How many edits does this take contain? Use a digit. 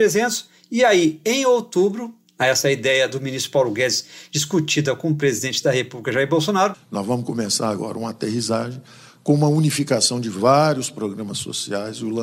1